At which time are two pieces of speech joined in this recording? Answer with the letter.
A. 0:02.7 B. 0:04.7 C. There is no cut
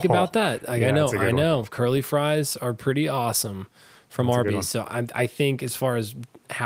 C